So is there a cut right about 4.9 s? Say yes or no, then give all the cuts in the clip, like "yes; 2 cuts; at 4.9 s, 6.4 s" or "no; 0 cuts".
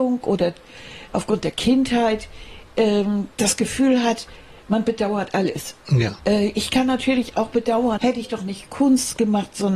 no; 3 cuts; at 3.3 s, 6.2 s, 8.0 s